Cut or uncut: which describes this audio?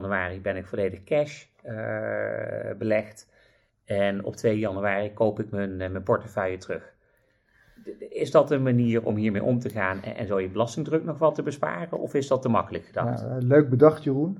uncut